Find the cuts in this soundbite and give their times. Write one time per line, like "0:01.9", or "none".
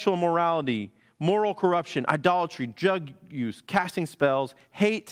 none